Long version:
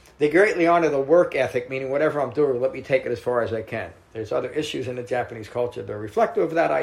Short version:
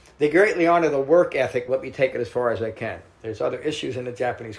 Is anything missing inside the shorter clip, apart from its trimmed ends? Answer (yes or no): yes